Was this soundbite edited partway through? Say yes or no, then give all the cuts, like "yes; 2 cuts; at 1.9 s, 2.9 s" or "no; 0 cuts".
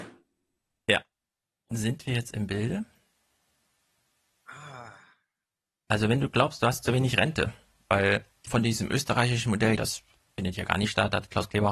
yes; 2 cuts; at 8.4 s, 9.8 s